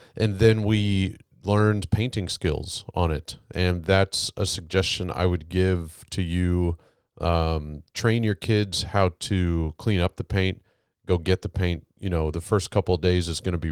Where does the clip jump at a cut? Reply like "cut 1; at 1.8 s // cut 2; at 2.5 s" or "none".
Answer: none